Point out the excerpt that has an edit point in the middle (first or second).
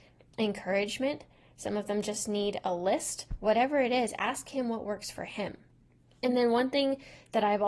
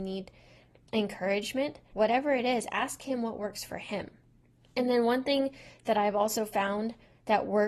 second